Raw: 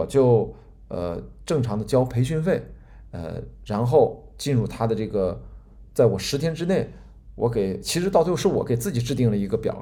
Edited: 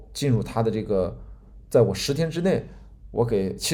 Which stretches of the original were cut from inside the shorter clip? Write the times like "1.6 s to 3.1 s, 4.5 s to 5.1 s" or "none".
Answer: none